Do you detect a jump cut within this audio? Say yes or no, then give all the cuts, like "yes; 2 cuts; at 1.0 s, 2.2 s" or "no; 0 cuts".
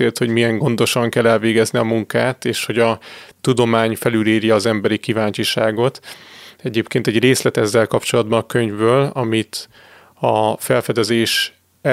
no; 0 cuts